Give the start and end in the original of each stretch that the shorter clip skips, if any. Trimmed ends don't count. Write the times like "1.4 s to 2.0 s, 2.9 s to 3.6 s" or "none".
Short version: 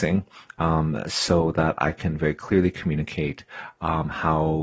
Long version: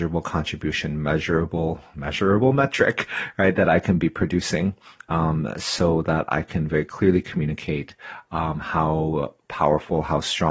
none